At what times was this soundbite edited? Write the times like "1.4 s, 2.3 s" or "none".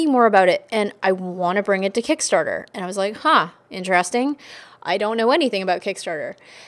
none